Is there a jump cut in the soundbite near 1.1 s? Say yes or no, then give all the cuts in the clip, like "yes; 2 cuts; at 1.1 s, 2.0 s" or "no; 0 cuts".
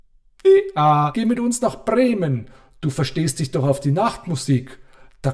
yes; 1 cut; at 1.1 s